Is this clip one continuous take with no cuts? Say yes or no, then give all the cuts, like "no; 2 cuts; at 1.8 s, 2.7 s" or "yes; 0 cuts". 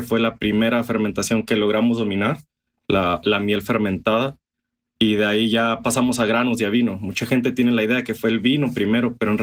yes; 0 cuts